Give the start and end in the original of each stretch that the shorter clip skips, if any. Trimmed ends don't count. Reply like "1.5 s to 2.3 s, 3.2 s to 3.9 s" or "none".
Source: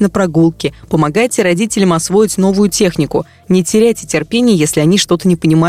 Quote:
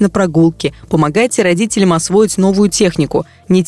none